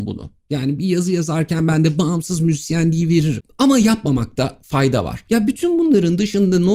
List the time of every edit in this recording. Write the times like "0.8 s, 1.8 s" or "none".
none